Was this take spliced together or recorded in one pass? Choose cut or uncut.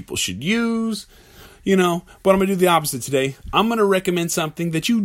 uncut